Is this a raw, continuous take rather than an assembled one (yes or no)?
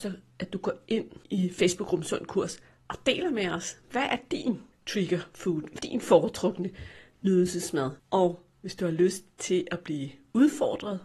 no